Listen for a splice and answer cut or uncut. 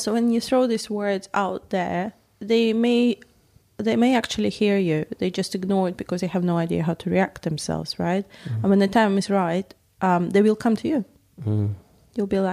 uncut